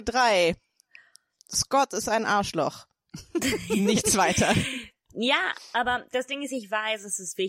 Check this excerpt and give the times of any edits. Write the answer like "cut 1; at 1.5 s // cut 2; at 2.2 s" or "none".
none